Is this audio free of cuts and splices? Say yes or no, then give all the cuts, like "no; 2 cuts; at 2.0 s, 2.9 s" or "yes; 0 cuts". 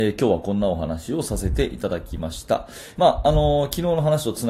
no; 1 cut; at 2.9 s